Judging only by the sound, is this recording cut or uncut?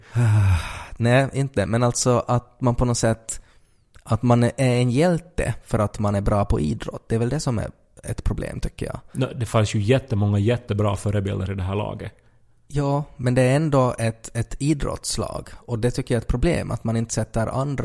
uncut